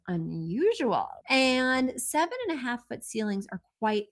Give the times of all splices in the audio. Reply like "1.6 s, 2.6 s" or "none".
1.2 s